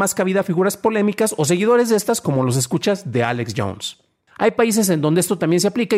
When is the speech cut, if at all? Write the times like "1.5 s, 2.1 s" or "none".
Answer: 4.3 s